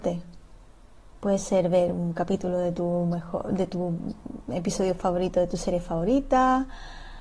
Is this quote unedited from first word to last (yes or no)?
yes